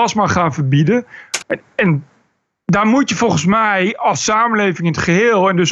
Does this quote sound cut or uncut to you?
cut